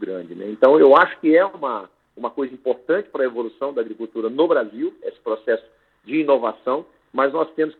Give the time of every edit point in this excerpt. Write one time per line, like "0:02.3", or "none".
none